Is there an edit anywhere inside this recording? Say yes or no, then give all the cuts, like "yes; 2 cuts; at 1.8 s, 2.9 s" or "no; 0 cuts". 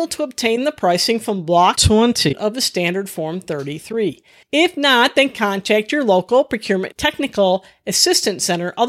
yes; 1 cut; at 4.4 s